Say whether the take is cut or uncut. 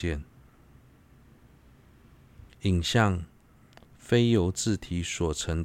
cut